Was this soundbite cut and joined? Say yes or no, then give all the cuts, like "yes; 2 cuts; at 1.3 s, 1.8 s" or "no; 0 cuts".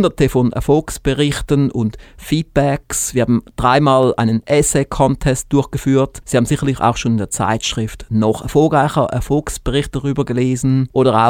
no; 0 cuts